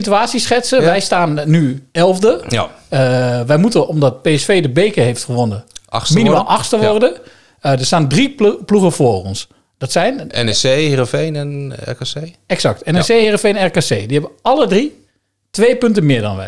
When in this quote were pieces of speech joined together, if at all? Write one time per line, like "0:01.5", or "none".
none